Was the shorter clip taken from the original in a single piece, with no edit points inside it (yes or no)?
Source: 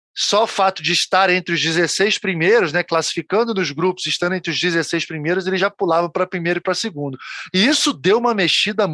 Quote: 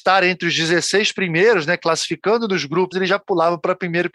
no